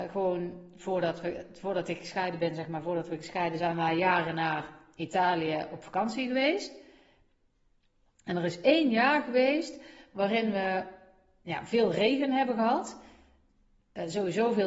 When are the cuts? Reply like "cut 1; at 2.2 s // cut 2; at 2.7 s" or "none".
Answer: cut 1; at 3.6 s